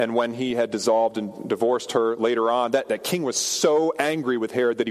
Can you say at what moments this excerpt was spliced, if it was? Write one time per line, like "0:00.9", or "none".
none